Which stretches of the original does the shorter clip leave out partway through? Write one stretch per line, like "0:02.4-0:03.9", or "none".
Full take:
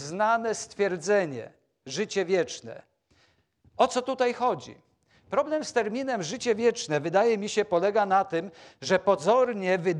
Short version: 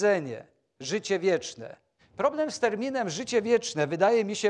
0:03.0-0:05.1

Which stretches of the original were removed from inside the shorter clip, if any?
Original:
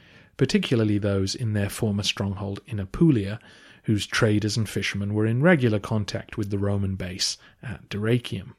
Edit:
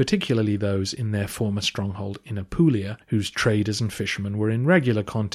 0:03.4-0:03.8

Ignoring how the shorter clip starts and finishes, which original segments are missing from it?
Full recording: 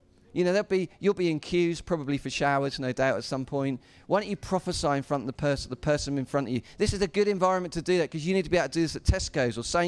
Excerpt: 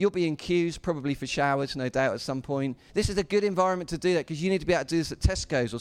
0:03.9-0:06.7

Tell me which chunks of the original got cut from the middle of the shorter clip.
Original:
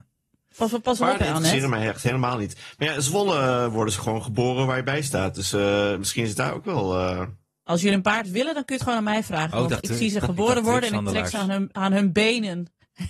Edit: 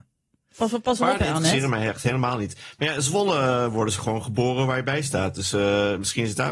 none

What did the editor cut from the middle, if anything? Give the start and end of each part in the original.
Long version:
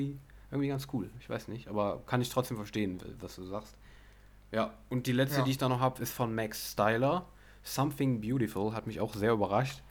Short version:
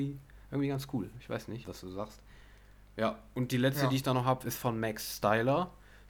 0:01.6-0:03.2

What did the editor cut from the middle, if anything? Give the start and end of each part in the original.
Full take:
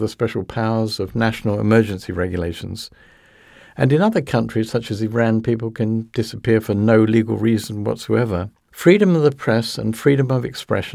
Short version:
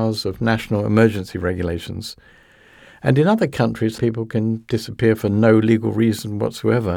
0:04.7-0:05.4

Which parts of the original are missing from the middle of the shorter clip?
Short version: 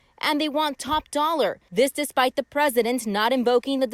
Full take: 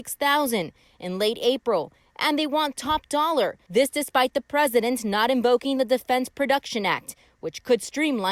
none

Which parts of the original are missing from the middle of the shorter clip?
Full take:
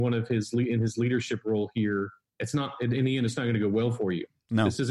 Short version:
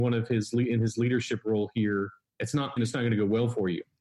0:02.8-0:03.2

